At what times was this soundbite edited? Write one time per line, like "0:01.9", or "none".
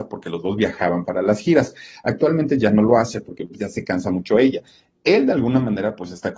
none